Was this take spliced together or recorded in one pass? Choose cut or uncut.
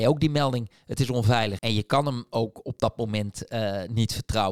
cut